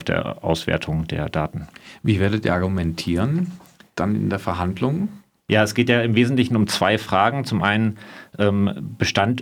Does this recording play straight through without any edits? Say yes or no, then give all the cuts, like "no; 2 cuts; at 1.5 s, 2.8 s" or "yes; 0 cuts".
yes; 0 cuts